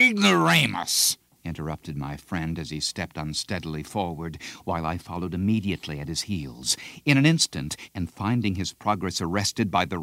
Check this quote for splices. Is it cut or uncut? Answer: cut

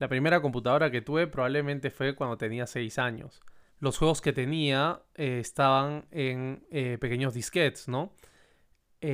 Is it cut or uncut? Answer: cut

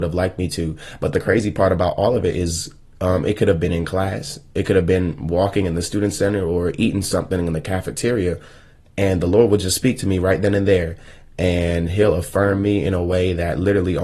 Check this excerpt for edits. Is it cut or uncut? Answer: uncut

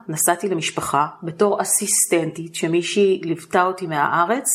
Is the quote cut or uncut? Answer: uncut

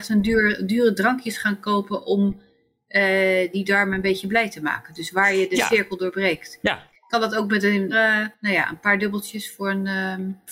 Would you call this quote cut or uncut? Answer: cut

